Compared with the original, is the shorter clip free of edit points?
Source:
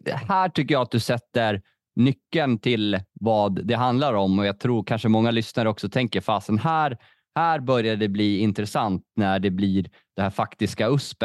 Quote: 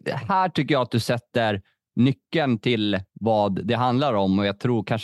yes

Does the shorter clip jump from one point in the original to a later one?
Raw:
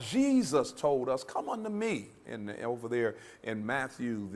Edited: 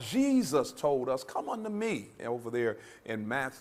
yes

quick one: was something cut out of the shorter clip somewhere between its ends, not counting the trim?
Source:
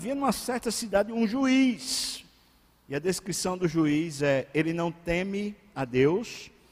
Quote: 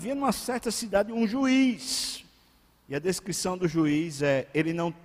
no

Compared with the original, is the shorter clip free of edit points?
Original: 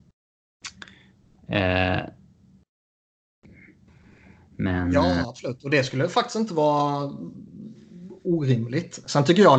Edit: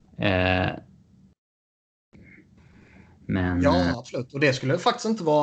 yes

